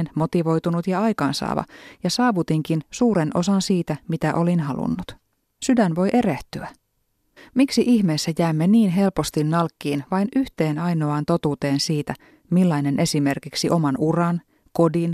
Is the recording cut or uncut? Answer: cut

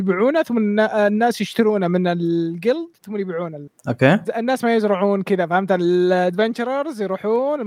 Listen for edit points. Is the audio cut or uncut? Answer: cut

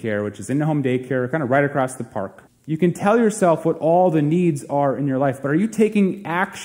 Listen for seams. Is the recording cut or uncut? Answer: cut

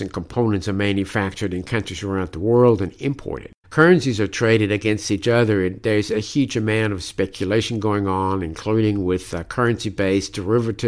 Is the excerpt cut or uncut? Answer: cut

